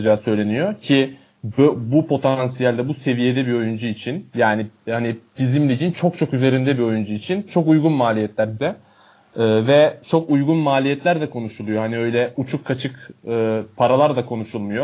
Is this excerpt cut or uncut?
cut